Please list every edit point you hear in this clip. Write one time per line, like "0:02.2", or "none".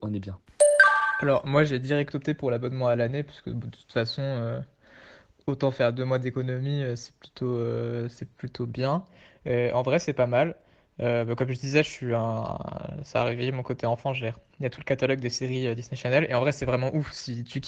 none